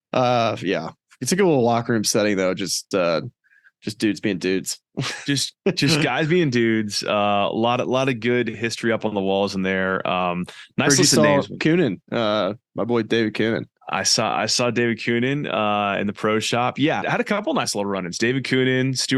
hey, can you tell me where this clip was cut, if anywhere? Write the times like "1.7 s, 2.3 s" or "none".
2.9 s, 17.0 s